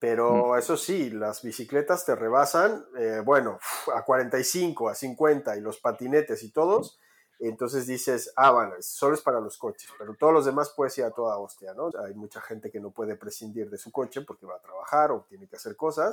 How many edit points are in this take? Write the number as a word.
one